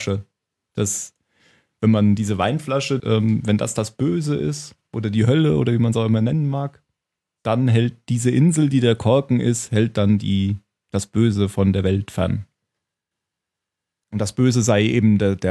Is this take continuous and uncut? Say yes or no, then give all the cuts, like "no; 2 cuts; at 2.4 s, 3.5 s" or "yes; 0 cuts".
no; 2 cuts; at 3.0 s, 14.0 s